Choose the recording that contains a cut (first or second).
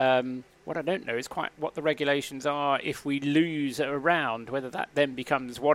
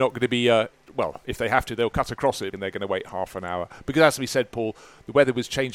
second